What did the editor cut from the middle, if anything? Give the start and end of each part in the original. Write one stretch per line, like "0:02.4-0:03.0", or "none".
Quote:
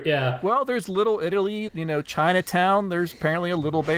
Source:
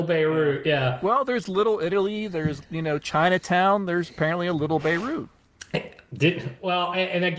0:02.3-0:02.7